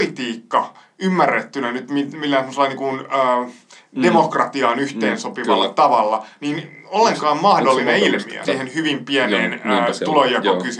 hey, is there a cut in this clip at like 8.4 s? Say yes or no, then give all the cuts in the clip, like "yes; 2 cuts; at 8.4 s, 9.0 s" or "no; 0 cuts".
yes; 1 cut; at 8.4 s